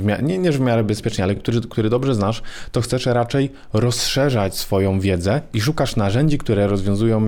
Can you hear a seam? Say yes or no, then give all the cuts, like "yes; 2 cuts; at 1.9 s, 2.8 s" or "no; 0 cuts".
no; 0 cuts